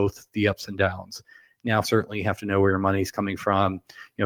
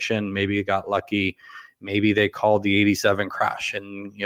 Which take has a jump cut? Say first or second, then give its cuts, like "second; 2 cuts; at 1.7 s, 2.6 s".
first; 1 cut; at 1.8 s